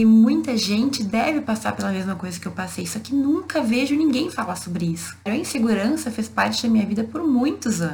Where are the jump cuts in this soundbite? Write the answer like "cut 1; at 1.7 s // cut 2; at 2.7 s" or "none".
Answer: cut 1; at 5.3 s